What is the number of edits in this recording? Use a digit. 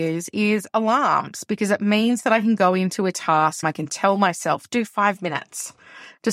2